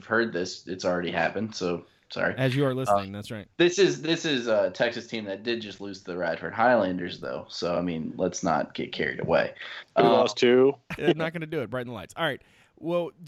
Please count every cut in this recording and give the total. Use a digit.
1